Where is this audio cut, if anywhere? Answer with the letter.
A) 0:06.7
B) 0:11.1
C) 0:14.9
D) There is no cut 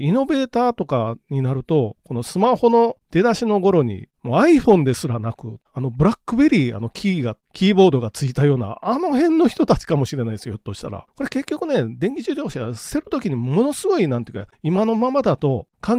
B